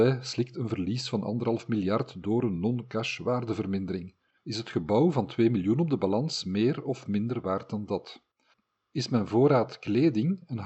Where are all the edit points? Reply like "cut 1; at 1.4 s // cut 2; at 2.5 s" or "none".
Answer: cut 1; at 4.4 s